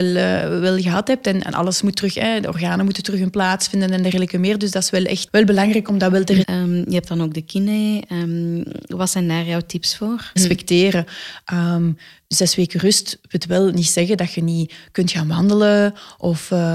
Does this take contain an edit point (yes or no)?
yes